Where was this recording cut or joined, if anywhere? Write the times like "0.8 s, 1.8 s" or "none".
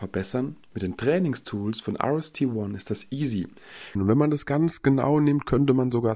4.0 s